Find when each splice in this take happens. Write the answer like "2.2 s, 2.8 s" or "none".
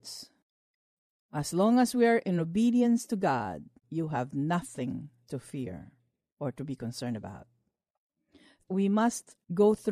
3.8 s